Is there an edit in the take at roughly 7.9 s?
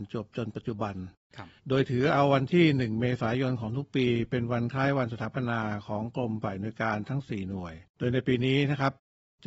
yes; 2 cuts; at 1.6 s, 7.9 s

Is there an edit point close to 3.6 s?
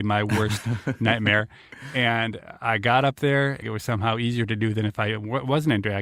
yes; 1 cut; at 3.6 s

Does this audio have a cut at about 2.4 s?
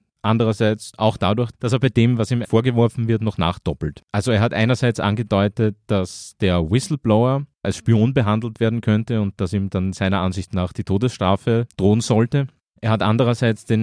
yes; 1 cut; at 2.4 s

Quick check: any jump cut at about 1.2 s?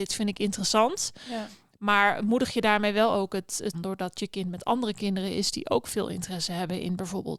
no; 1 cut; at 3.7 s

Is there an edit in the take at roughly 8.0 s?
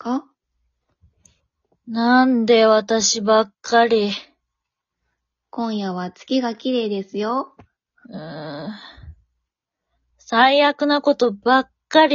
yes; 1 cut; at 8.0 s

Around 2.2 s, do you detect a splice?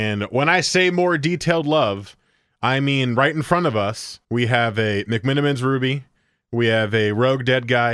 no; 1 cut; at 4.2 s

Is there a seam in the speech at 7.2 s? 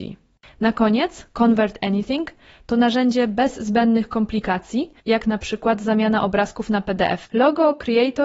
yes; 2 cuts; at 5.0 s, 7.2 s

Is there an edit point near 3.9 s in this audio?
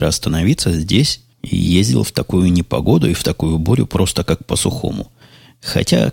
no; 0 cuts

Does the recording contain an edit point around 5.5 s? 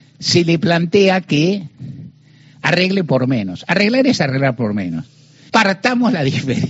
yes; 1 cut; at 5.5 s

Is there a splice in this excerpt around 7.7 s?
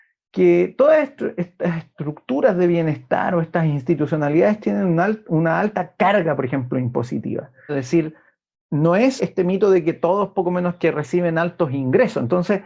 yes; 2 cuts; at 7.7 s, 9.2 s

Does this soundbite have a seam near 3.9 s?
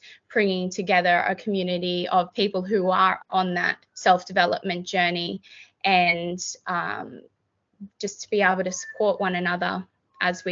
yes; 2 cuts; at 3.9 s, 7.9 s

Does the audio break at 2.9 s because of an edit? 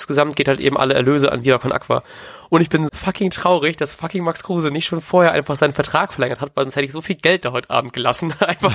yes; 1 cut; at 2.9 s

